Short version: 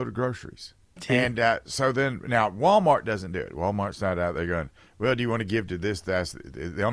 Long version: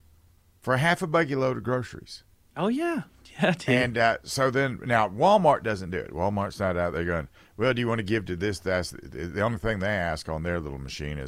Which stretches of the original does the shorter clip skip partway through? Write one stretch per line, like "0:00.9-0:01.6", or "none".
0:02.5-0:03.5